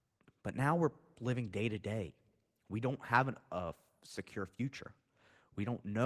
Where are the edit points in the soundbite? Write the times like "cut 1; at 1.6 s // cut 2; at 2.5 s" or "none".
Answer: none